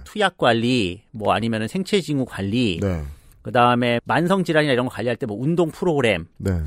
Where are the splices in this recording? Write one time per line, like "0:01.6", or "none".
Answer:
none